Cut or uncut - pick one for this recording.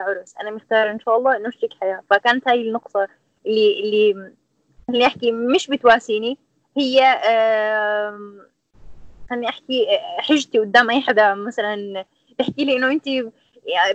uncut